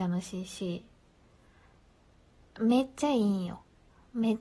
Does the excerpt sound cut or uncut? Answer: uncut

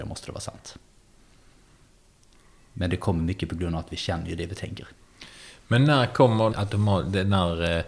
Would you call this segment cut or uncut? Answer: cut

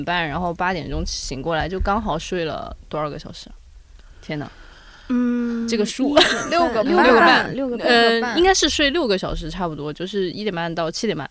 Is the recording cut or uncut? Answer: uncut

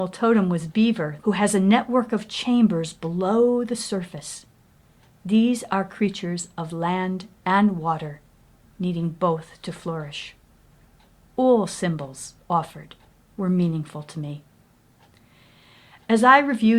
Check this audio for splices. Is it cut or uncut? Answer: cut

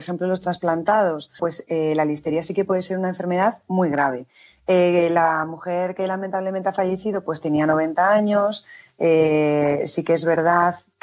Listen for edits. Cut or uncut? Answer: cut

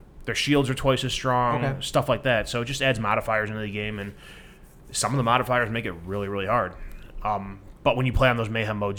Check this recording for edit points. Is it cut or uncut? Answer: uncut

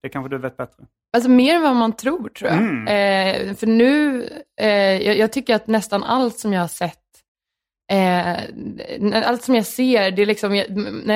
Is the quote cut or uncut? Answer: uncut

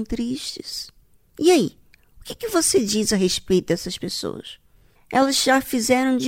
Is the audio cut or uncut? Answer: uncut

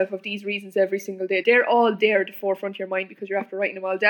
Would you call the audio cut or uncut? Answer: cut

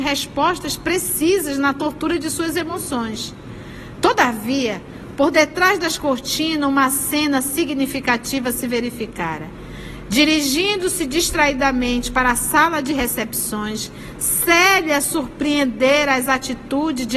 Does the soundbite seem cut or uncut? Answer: uncut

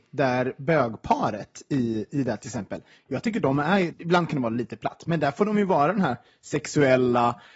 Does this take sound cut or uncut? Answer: cut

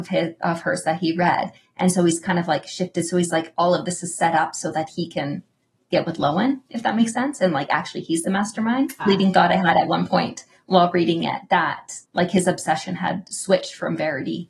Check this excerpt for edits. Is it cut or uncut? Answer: cut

